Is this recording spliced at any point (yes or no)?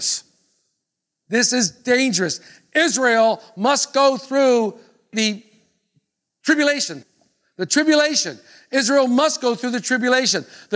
no